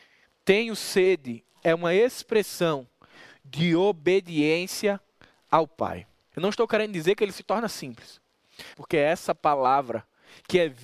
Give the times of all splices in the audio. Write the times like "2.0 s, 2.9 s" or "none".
6.3 s, 8.7 s